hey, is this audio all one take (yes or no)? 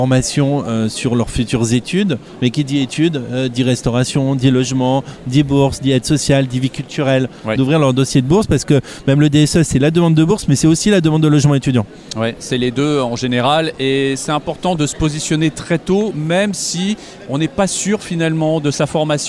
no